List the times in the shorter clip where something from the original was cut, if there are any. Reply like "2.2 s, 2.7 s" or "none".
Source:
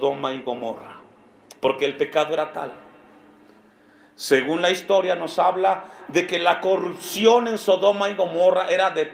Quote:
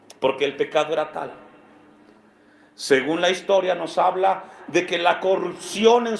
none